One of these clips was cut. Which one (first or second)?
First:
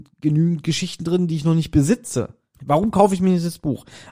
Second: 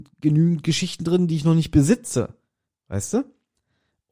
first